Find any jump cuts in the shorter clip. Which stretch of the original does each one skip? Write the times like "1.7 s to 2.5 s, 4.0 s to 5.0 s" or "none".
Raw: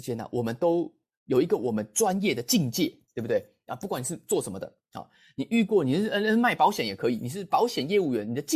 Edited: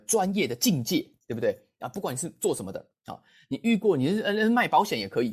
none